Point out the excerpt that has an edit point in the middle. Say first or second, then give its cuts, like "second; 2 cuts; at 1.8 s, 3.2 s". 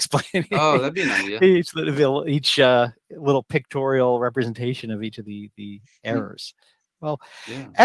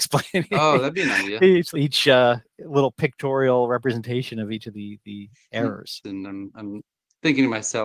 second; 2 cuts; at 1.7 s, 6.0 s